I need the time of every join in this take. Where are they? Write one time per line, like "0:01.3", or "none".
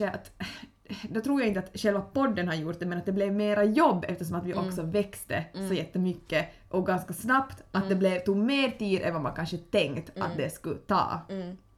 none